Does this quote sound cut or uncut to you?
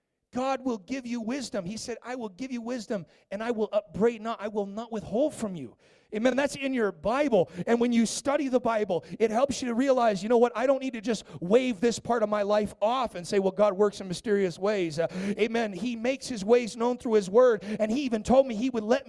uncut